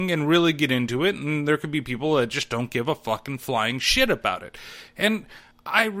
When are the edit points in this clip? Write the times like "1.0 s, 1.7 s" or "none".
none